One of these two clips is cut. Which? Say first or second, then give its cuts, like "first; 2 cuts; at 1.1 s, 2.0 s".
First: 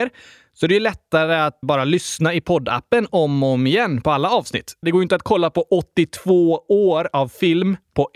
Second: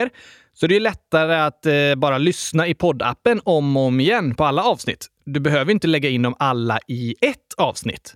first; 2 cuts; at 1.6 s, 4.8 s